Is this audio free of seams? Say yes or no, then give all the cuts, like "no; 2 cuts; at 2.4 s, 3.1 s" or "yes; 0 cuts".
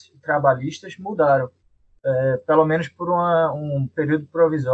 yes; 0 cuts